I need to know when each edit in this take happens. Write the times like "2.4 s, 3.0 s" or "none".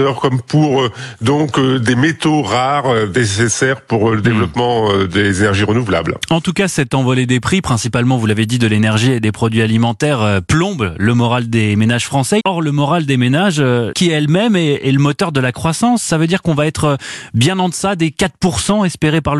12.4 s, 13.9 s